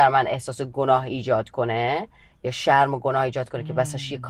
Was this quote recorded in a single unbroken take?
yes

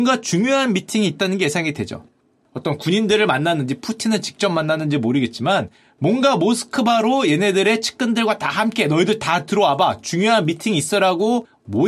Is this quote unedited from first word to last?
yes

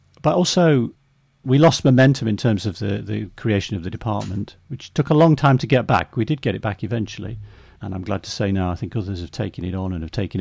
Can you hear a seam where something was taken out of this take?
no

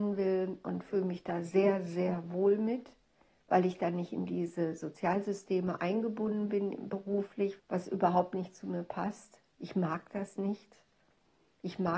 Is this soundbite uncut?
no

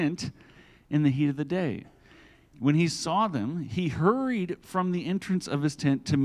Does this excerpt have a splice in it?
yes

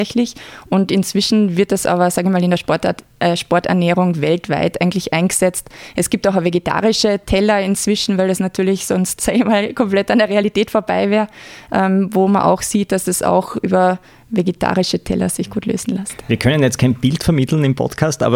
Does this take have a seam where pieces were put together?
yes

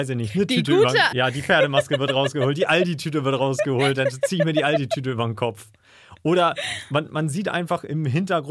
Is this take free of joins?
no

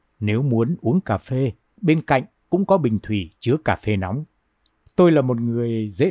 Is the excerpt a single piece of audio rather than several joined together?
no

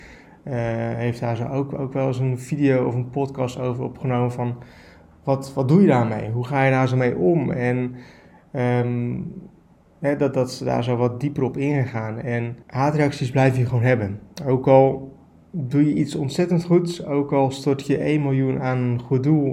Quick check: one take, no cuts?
no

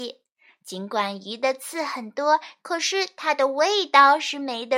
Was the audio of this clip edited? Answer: yes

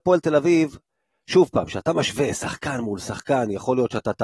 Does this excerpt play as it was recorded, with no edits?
yes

